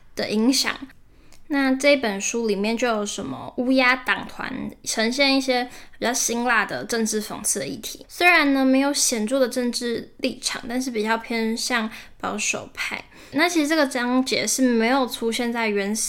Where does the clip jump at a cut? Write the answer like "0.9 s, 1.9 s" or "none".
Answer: 8.0 s, 13.3 s